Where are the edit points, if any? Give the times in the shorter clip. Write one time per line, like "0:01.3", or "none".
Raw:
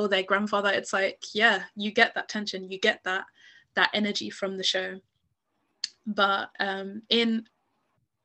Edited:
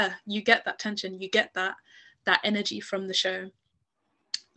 none